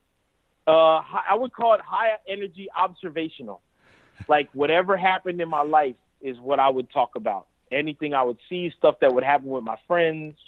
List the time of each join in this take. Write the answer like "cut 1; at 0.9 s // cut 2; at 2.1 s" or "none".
none